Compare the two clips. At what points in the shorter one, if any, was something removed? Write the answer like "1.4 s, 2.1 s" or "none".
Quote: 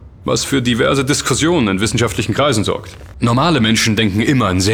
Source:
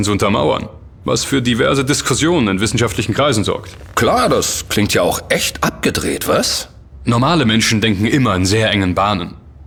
3.1 s